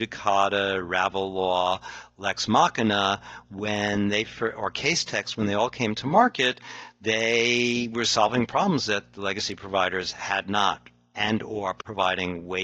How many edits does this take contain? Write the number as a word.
zero